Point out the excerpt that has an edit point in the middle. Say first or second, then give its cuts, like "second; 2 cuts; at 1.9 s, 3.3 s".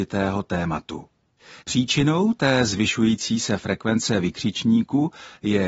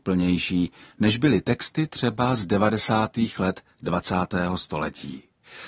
first; 1 cut; at 1.6 s